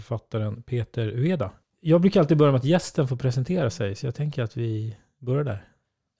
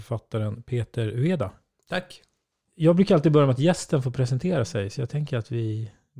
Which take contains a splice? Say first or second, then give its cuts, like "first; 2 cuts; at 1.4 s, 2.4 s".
first; 1 cut; at 1.6 s